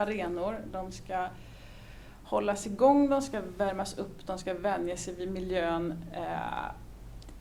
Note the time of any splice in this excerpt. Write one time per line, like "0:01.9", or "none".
none